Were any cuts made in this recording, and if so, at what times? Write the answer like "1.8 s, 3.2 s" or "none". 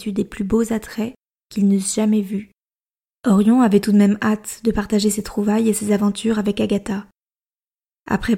3.1 s